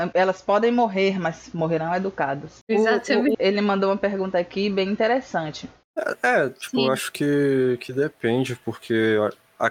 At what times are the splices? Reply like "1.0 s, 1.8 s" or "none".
3.3 s, 5.8 s

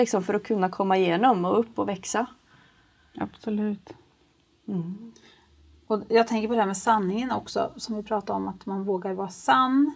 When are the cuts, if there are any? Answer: none

